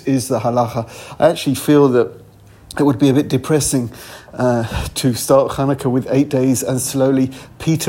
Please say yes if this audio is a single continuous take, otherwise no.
yes